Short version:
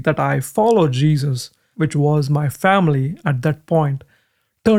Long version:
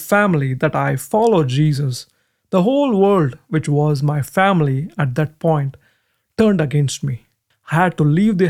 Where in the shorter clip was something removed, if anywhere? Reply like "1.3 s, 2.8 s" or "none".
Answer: 1.7 s

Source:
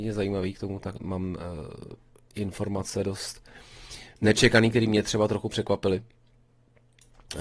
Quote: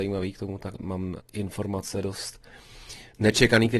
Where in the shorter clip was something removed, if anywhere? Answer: 1.2 s

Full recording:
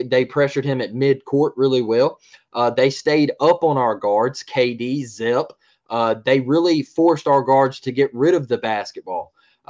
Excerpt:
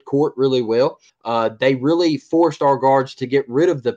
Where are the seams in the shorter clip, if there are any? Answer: 1.1 s

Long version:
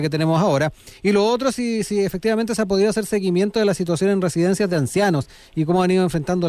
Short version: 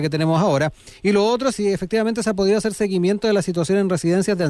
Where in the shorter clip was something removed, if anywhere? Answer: 1.5 s

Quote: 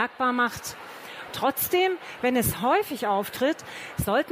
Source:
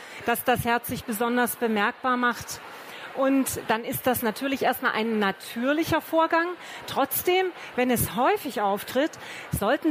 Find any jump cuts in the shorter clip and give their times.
1.3 s

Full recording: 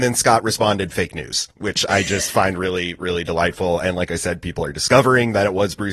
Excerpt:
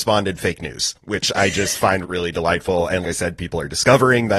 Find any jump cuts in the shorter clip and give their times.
2.0 s, 3.0 s

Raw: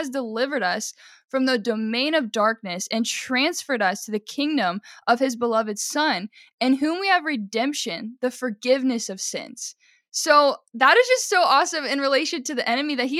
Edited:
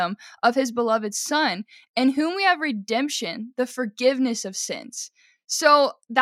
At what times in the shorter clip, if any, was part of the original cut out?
none

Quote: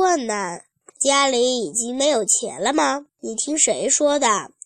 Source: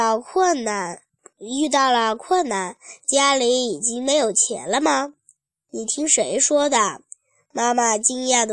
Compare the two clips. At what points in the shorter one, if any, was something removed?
0.9 s, 3.1 s

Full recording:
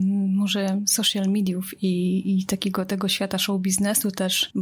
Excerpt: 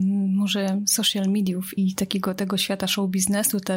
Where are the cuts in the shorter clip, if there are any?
1.8 s

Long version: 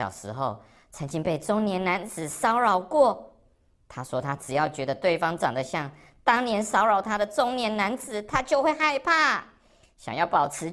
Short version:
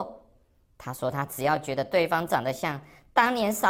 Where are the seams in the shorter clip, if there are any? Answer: none

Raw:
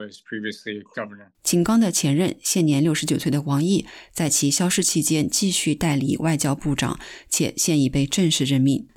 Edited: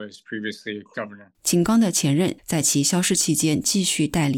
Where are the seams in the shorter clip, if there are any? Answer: 2.4 s

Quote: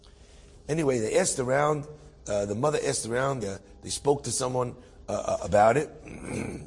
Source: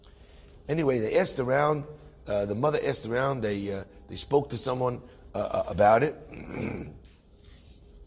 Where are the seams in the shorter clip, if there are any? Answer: 3.4 s

